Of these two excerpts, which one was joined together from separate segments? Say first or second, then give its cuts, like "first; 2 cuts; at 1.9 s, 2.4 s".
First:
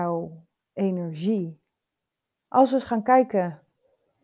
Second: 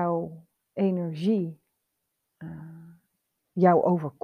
first; 1 cut; at 2.3 s